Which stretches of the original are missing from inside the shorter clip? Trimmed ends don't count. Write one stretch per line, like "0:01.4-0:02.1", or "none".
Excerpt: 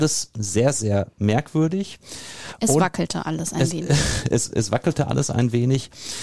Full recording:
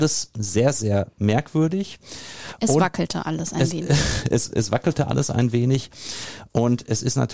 none